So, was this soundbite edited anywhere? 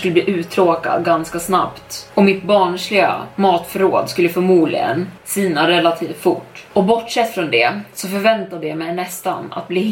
no; 0 cuts

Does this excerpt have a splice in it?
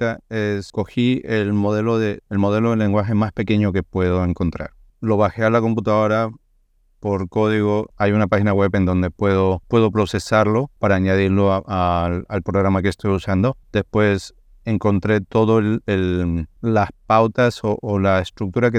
no; 0 cuts

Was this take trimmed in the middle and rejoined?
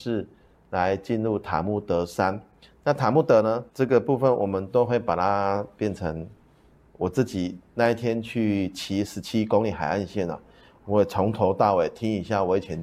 yes; 1 cut; at 3.7 s

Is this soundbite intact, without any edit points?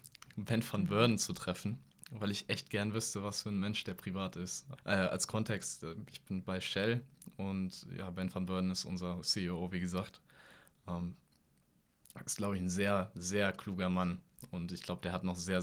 no; 1 cut; at 4.8 s

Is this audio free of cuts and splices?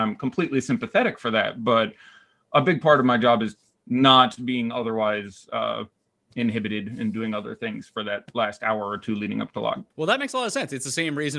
no; 1 cut; at 9.9 s

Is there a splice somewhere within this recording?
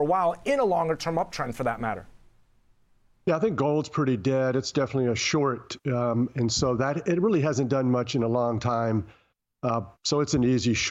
no; 0 cuts

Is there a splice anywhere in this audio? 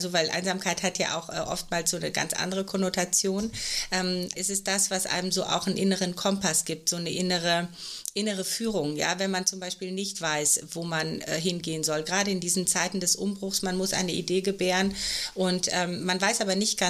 yes; 1 cut; at 4.3 s

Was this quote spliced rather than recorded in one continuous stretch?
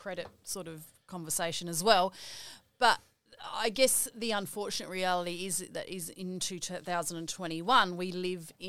no; 0 cuts

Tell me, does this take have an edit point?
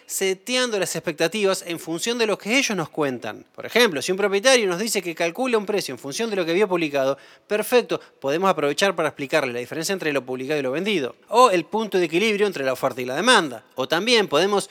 no; 0 cuts

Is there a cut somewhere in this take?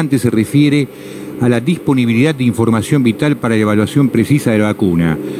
no; 0 cuts

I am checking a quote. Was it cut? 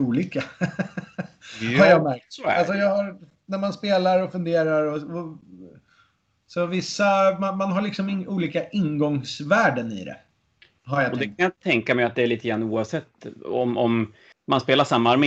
no; 0 cuts

